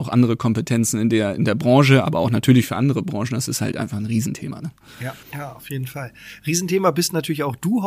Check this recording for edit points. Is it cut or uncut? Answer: cut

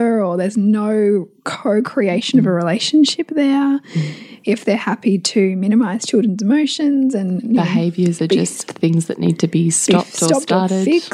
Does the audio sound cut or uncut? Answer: uncut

